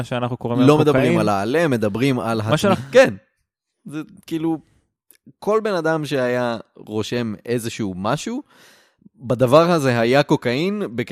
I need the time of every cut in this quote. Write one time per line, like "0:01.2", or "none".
0:02.7